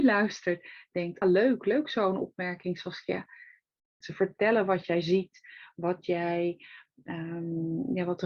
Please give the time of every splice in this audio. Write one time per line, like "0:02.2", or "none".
0:01.2
0:04.0